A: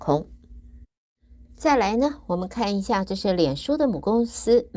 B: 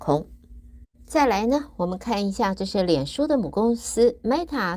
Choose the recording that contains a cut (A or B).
B